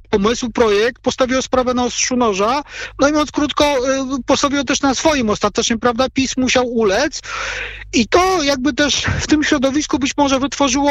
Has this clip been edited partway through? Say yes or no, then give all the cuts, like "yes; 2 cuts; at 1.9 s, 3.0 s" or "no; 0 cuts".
no; 0 cuts